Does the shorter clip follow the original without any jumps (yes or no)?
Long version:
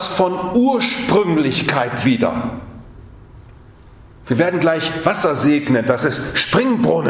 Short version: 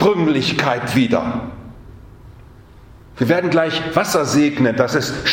yes